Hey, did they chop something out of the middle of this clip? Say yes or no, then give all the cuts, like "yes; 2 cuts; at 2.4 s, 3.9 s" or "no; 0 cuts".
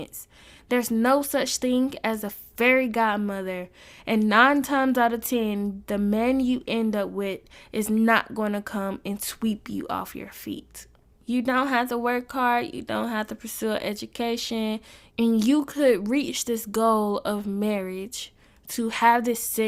yes; 2 cuts; at 11.1 s, 15.1 s